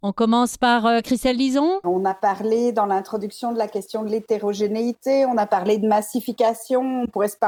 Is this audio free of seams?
no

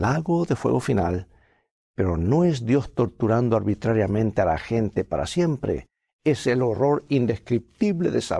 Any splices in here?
no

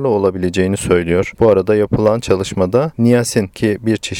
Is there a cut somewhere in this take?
yes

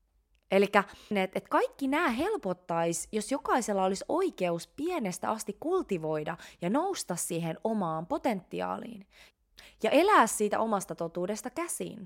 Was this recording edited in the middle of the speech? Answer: yes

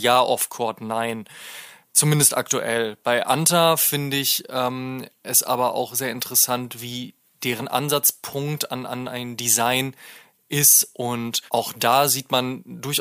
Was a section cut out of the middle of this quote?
yes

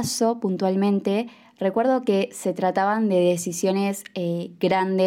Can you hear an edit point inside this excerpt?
no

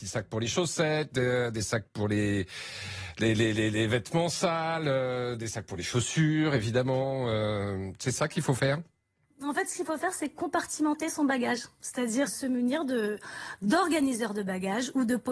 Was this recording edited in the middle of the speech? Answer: yes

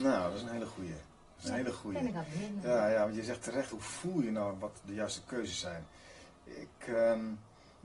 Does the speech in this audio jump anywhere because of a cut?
no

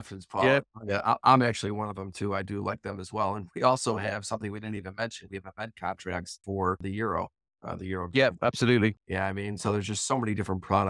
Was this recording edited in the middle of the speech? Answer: no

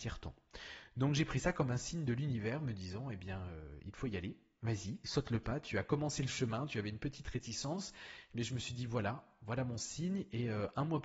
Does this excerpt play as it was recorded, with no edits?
yes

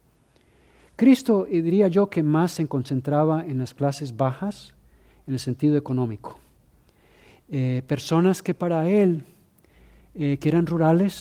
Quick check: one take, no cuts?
yes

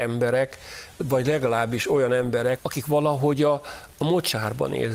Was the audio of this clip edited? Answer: yes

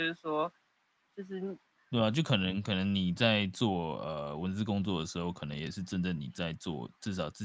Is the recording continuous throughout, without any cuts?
no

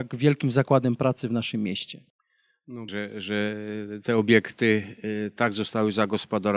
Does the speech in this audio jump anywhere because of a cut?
yes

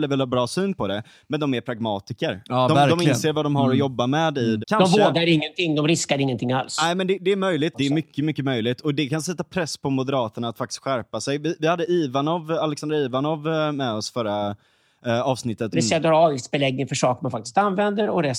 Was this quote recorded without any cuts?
no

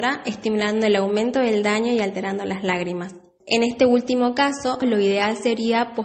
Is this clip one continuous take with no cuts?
no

